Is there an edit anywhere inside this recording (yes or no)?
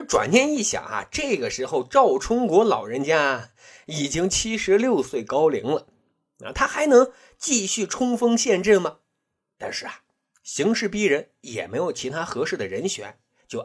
no